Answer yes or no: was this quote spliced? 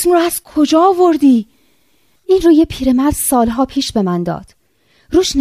yes